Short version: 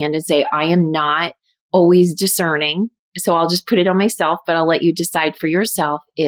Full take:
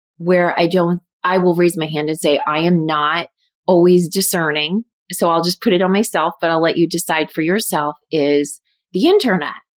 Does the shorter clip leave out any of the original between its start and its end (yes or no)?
no